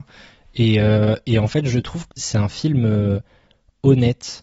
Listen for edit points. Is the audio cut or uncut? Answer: cut